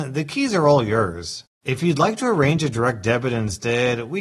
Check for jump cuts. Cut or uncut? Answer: uncut